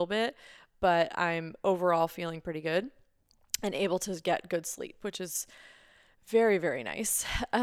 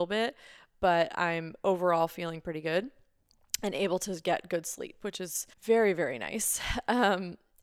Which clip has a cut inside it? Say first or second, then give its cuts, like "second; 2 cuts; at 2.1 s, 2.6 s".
second; 1 cut; at 5.5 s